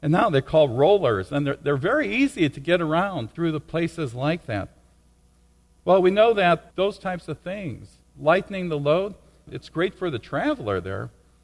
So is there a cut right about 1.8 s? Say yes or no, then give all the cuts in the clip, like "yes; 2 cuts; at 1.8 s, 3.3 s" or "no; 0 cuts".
no; 0 cuts